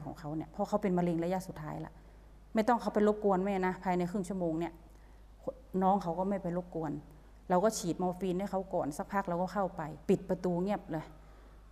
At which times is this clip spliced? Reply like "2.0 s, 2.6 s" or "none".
10.0 s